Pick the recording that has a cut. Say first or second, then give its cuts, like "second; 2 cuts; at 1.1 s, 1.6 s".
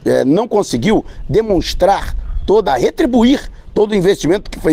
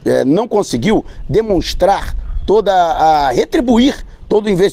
first; 1 cut; at 2.7 s